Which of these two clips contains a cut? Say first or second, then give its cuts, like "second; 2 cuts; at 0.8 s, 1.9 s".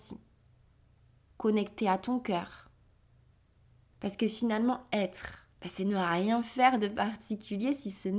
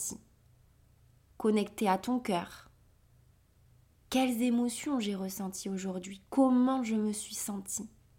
first; 2 cuts; at 3.9 s, 5.5 s